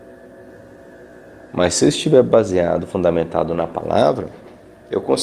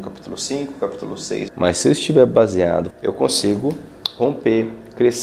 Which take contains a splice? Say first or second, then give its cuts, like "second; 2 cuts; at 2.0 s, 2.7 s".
second; 2 cuts; at 1.5 s, 2.9 s